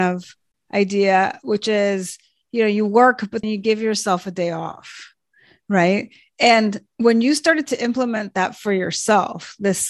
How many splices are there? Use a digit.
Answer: 1